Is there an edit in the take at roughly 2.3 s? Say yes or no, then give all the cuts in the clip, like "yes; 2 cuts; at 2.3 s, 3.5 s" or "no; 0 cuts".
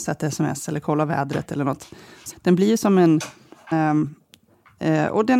yes; 2 cuts; at 2.3 s, 3.7 s